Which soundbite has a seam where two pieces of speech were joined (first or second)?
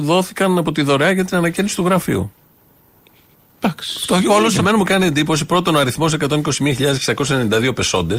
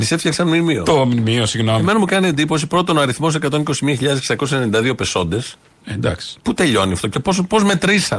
first